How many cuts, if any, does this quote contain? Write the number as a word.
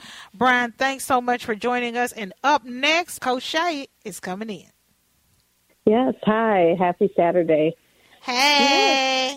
two